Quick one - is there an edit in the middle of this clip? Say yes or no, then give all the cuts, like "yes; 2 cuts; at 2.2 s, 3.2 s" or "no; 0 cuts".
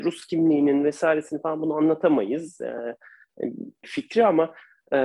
yes; 1 cut; at 3.8 s